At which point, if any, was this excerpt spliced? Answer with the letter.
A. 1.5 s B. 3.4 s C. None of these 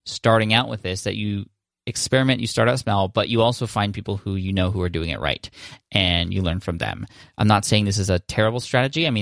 C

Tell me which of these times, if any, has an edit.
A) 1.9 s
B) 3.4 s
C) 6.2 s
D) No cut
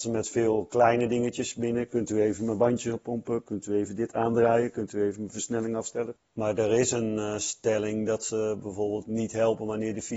C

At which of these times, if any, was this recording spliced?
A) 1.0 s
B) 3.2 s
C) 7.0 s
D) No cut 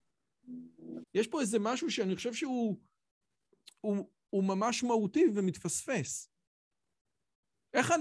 A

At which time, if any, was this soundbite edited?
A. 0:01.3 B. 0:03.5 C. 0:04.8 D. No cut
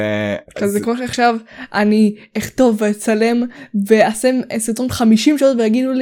D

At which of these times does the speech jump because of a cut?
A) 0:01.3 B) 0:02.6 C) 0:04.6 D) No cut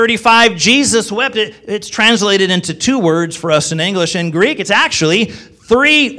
D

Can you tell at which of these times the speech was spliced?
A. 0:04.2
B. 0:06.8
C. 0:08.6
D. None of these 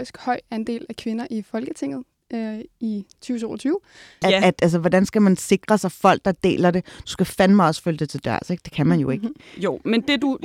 A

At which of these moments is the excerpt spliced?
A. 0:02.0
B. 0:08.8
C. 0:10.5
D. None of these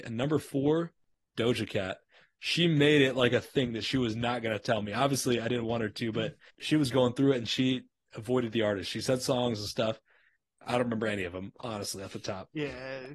D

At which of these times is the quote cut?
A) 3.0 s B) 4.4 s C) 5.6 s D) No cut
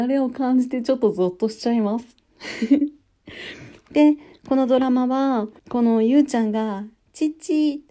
C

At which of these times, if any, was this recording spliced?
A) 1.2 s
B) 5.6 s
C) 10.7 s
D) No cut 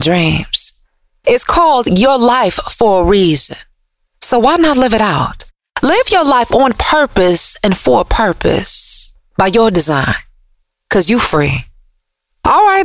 A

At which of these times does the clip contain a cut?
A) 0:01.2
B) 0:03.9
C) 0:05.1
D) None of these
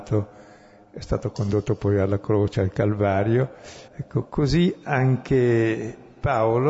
B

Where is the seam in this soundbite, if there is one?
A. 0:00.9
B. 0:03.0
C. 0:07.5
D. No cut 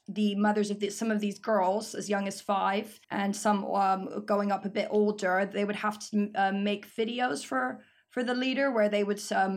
B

